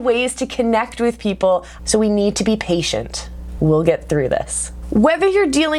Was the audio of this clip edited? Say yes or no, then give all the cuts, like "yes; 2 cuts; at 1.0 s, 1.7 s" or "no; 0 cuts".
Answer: yes; 2 cuts; at 1.8 s, 3.6 s